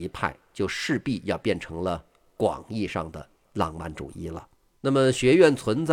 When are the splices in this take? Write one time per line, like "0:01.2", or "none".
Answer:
0:04.8